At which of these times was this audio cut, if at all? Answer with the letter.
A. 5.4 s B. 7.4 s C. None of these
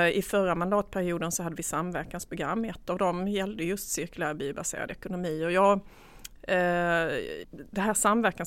B